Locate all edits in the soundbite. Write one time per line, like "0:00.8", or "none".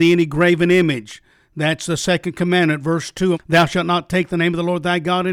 0:03.3